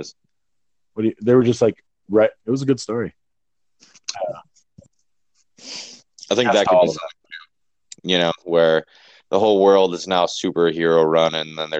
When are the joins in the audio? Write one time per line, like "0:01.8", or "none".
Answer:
0:02.4
0:04.1

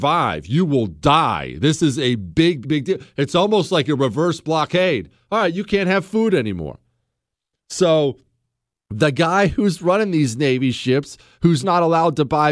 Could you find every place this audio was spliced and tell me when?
0:02.6
0:11.6

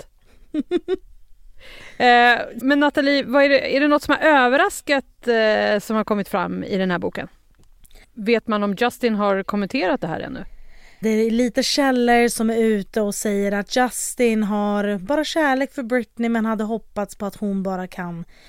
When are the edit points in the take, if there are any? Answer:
0:02.6
0:08.0
0:11.0

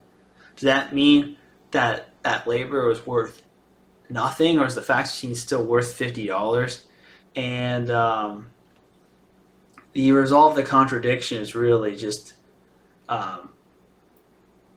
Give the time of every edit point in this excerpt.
0:07.2

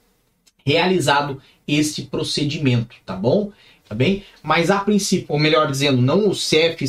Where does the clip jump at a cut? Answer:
0:03.8
0:05.3

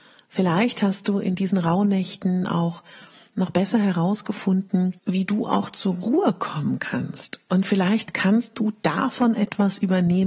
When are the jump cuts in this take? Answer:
0:05.0

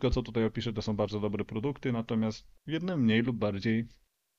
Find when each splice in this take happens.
0:02.6

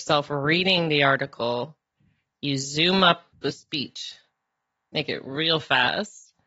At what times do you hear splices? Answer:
0:03.3

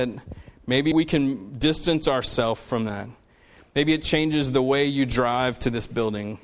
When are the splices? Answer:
0:00.9

